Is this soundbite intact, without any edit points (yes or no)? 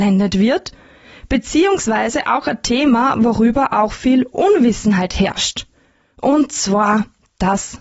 yes